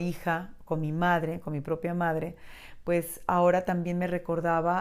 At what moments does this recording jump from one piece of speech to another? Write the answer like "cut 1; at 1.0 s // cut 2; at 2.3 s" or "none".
none